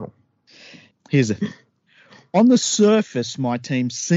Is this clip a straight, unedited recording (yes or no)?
no